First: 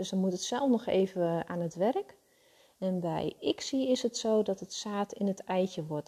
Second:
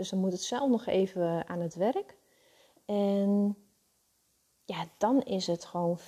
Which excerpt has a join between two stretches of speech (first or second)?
second